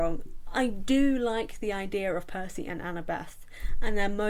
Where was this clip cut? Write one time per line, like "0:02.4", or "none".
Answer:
none